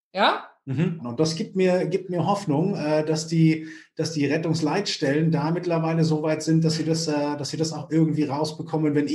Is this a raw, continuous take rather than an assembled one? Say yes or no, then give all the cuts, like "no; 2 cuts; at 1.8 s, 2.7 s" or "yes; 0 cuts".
no; 1 cut; at 1.0 s